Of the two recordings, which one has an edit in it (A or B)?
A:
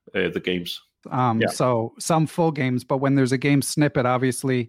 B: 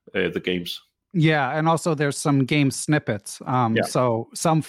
A